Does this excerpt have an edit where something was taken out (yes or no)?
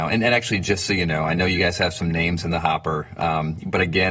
no